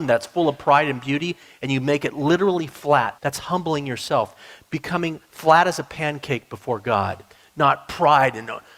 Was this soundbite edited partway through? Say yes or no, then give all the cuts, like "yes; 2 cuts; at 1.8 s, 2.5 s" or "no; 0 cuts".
yes; 1 cut; at 3.2 s